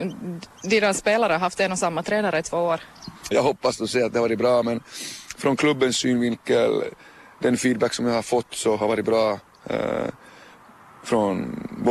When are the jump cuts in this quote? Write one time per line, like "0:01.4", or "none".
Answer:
0:03.3